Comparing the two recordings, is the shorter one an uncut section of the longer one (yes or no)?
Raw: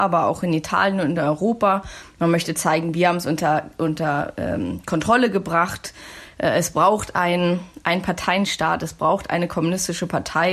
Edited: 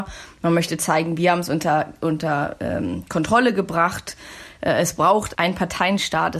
no